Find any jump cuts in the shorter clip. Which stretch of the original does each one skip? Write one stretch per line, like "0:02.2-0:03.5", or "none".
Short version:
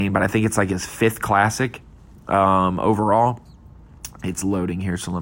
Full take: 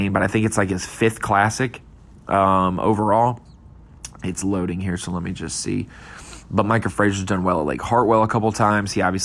none